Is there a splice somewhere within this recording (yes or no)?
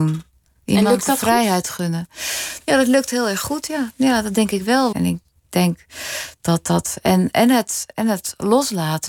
yes